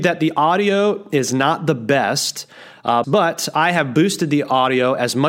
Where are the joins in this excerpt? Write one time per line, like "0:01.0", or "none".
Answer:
0:03.0